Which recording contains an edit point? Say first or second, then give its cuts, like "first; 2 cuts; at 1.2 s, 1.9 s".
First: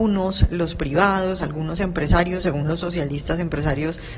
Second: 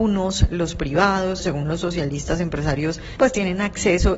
second; 2 cuts; at 1.4 s, 3.2 s